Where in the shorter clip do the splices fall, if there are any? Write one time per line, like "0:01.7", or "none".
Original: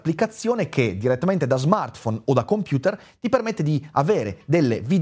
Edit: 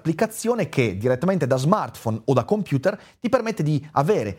none